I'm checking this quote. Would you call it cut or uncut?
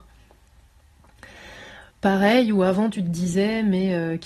uncut